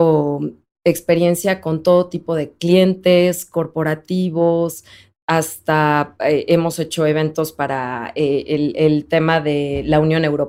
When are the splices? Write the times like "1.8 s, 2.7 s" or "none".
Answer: none